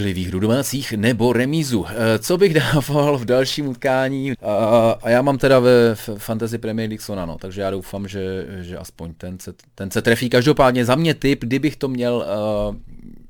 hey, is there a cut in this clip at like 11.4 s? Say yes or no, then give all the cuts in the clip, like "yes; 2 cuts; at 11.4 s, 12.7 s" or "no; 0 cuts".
no; 1 cut; at 4.3 s